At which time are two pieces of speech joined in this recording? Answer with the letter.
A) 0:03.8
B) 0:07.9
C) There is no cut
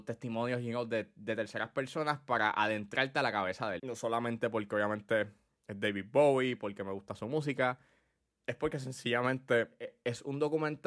A